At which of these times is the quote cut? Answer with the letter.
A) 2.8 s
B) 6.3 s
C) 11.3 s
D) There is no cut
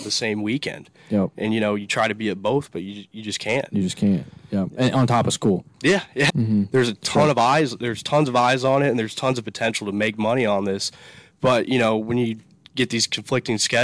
B